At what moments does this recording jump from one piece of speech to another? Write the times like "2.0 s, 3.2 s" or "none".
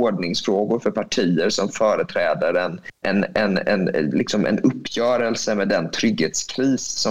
3.0 s